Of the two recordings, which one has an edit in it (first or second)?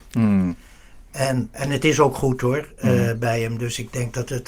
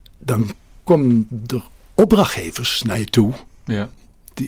first